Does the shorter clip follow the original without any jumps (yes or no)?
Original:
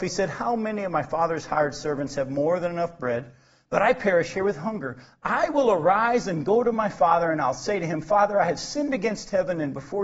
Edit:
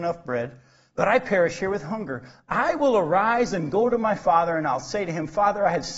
yes